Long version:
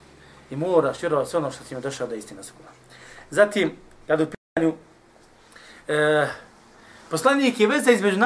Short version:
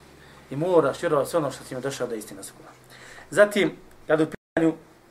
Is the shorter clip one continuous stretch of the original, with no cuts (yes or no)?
yes